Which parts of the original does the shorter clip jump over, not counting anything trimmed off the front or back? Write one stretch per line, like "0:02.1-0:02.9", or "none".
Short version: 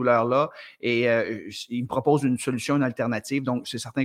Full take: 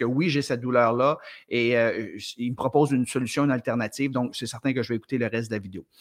none